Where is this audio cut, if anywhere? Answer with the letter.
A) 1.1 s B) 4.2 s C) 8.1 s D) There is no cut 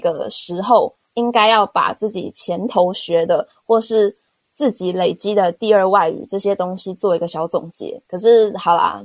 D